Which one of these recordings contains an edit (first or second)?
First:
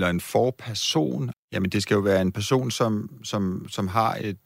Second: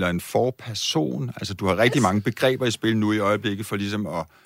first